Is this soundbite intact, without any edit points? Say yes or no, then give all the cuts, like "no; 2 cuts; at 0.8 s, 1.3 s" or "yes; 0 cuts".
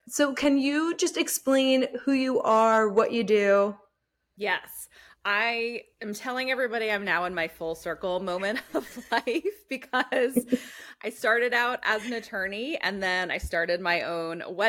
yes; 0 cuts